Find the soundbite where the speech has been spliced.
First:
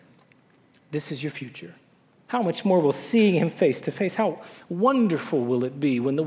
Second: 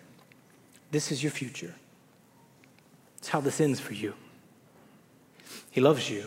first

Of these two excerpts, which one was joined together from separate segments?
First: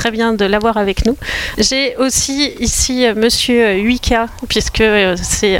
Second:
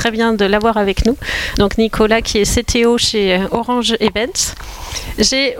first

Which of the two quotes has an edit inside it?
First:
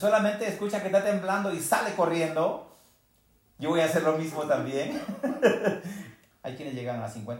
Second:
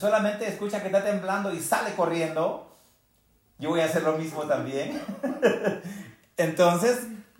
first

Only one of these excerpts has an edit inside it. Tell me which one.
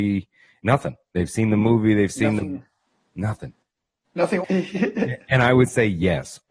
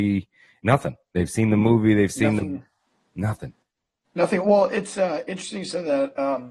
first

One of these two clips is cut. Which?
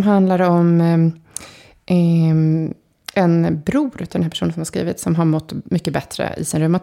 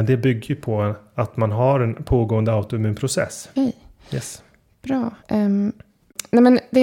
second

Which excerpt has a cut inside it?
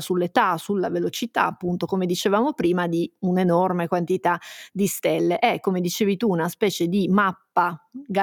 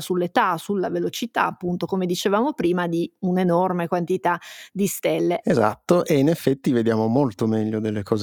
second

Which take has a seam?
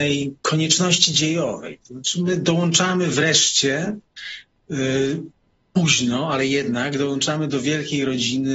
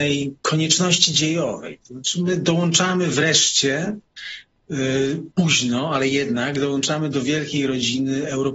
second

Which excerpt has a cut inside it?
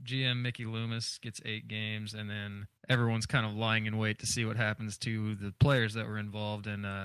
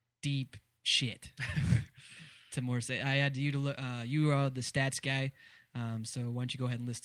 first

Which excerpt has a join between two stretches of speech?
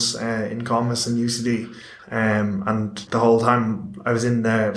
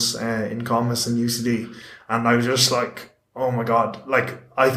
first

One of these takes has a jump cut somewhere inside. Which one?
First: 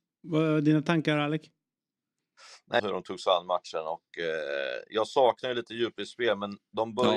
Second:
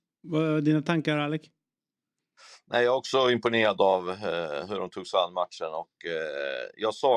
first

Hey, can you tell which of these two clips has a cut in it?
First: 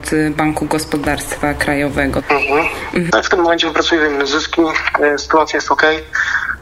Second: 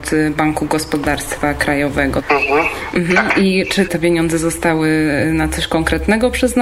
first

